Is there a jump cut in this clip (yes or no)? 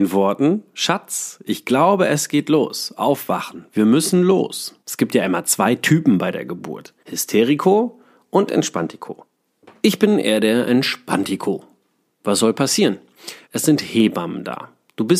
yes